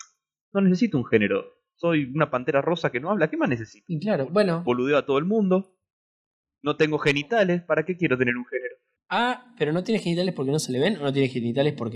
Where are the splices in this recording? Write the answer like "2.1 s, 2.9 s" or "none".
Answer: none